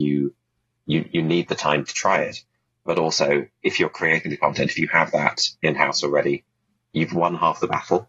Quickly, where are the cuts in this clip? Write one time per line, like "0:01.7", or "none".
none

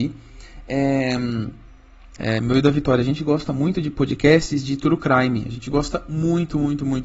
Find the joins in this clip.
0:02.2

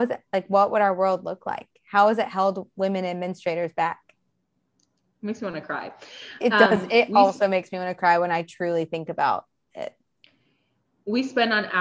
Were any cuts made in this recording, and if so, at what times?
none

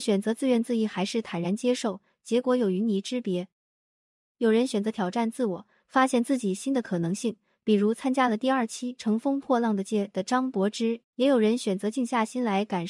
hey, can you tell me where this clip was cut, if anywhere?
0:09.8
0:11.0

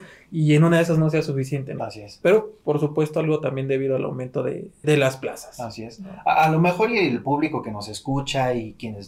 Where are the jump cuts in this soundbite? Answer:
0:01.8
0:04.8

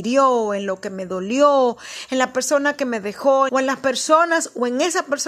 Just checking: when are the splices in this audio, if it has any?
0:03.5

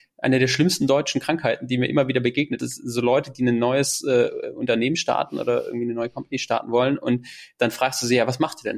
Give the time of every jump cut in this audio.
0:02.6

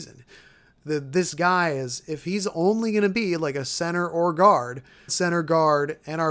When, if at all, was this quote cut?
0:05.1

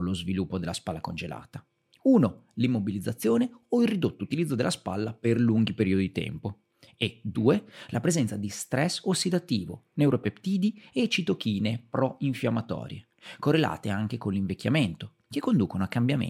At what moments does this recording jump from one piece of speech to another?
none

